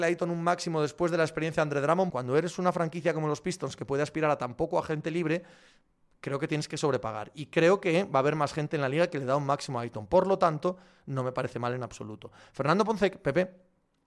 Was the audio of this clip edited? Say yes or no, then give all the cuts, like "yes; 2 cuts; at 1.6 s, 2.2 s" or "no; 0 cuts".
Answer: yes; 1 cut; at 2.1 s